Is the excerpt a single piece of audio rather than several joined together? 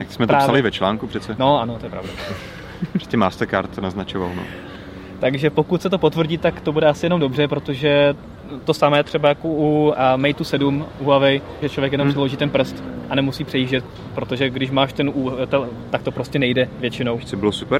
no; 2 cuts; at 11.6 s, 15.9 s

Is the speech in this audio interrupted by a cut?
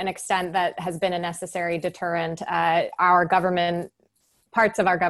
no; 0 cuts

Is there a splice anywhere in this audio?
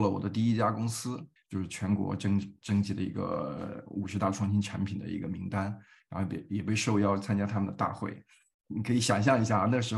yes; 2 cuts; at 1.4 s, 8.6 s

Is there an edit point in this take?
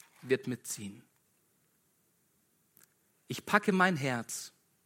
no; 0 cuts

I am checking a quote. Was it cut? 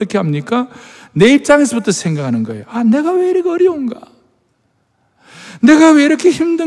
no; 0 cuts

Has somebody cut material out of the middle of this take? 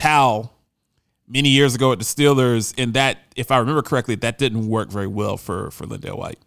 no; 0 cuts

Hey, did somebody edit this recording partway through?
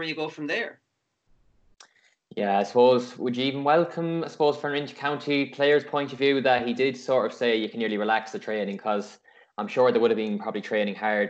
no; 0 cuts

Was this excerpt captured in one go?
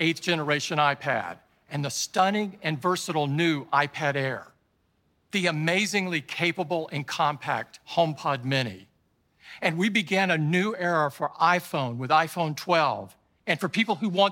yes; 0 cuts

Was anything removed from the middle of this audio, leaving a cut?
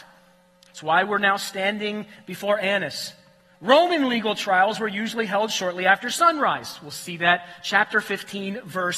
no; 0 cuts

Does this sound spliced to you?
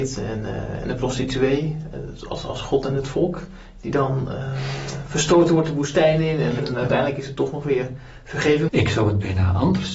yes; 2 cuts; at 6.6 s, 8.7 s

